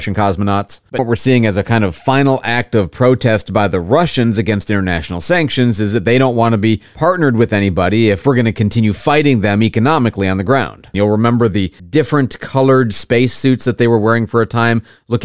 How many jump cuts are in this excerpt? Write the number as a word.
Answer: two